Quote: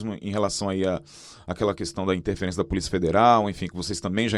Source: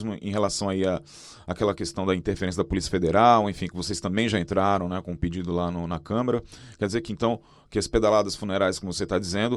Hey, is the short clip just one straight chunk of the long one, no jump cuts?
yes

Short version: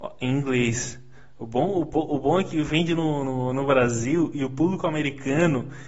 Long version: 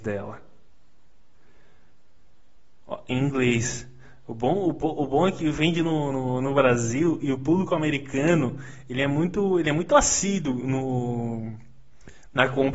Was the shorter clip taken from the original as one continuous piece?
yes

